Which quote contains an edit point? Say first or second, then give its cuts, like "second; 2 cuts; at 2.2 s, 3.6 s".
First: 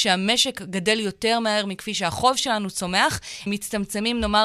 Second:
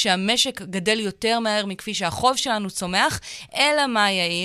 first; 1 cut; at 3.5 s